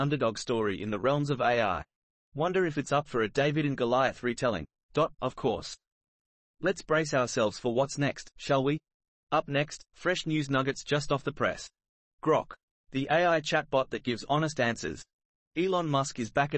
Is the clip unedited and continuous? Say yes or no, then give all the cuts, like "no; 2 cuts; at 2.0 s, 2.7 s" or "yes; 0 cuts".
no; 1 cut; at 5.1 s